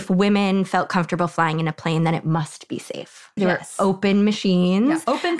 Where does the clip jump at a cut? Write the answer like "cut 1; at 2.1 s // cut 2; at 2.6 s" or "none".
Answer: cut 1; at 3.4 s